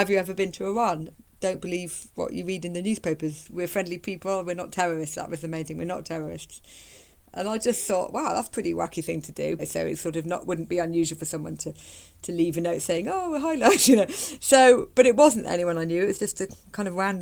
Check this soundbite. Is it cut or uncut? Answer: cut